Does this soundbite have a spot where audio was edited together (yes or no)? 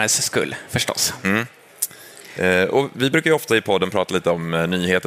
no